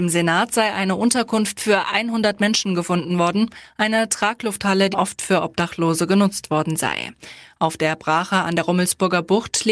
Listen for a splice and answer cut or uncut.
cut